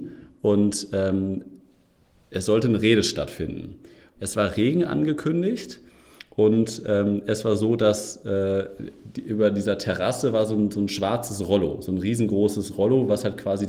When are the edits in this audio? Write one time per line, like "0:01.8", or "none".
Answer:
0:04.2

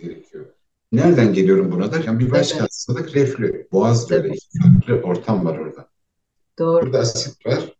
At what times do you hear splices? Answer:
0:02.0
0:03.7
0:06.8

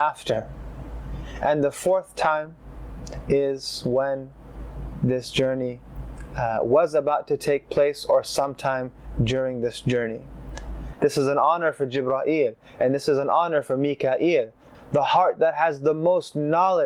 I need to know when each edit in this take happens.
0:10.9
0:14.7

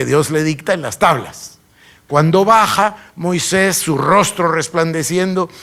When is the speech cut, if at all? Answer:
none

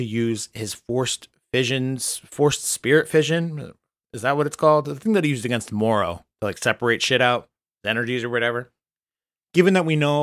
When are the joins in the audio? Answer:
none

